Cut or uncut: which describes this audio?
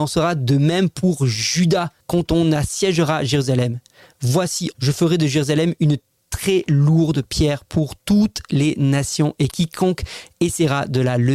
cut